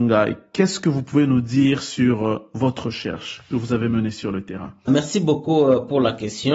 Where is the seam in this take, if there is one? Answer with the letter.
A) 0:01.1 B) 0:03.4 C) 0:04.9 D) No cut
C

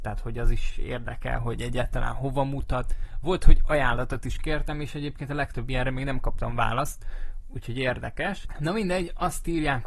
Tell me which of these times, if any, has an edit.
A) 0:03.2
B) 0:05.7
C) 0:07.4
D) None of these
C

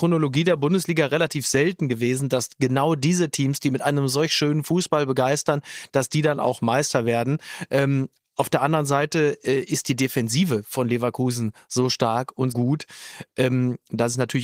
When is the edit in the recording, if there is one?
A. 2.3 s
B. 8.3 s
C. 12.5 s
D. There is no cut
C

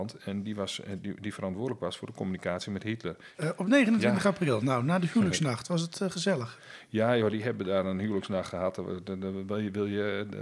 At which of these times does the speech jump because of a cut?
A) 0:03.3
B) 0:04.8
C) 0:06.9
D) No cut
A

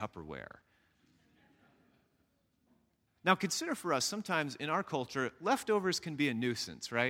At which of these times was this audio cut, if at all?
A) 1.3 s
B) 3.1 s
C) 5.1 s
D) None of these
B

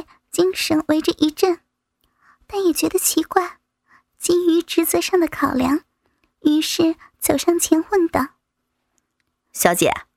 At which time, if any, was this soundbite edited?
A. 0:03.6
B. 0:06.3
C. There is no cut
C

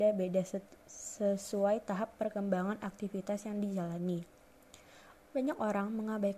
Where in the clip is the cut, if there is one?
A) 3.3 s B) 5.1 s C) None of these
B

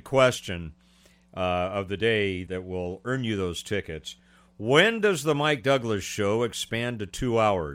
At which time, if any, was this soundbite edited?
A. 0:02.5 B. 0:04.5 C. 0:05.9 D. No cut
A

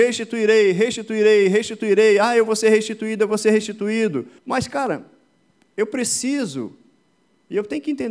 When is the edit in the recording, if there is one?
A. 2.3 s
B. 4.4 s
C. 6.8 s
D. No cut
B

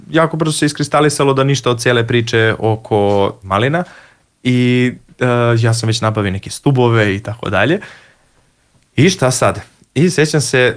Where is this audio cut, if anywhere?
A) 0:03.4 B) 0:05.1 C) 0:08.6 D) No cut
A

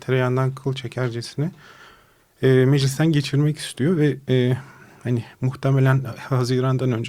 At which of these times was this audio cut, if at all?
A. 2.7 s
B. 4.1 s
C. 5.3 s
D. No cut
C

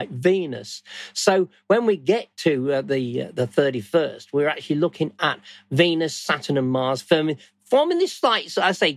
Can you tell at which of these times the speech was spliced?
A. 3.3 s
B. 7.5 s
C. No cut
C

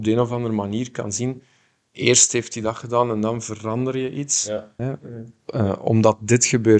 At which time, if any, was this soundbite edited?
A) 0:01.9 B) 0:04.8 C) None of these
B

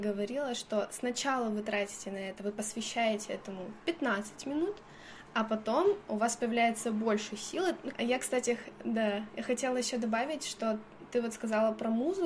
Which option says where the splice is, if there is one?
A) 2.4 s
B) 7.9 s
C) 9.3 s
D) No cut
B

